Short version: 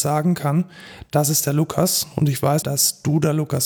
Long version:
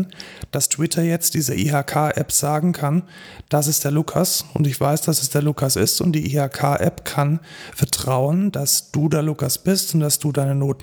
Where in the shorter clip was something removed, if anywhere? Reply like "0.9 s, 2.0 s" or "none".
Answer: 2.6 s

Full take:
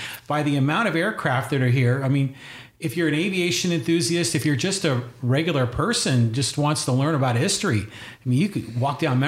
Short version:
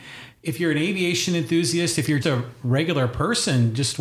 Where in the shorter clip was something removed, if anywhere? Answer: 2.2 s

